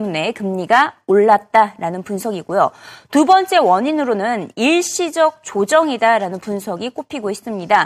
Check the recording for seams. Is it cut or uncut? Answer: uncut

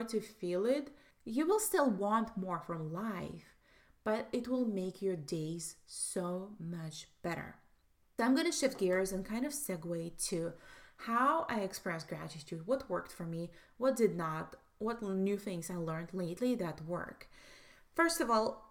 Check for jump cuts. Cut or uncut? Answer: uncut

